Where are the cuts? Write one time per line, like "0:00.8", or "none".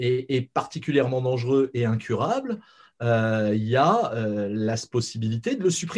none